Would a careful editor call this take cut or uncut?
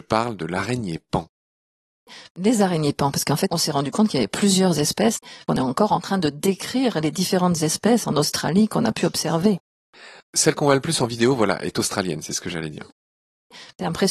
uncut